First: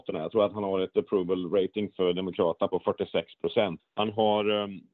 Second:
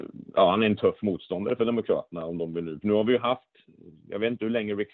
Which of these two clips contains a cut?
first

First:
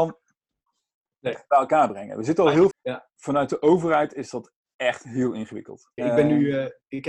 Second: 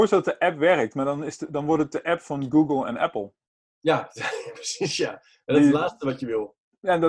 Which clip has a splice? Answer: first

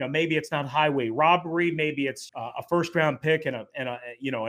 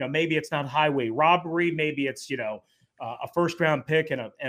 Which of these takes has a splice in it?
first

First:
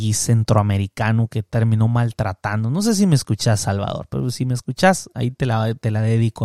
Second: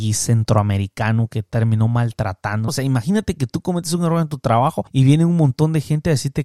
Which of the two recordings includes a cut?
second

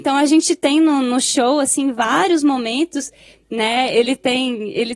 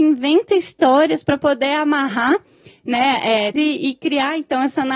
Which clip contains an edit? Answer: second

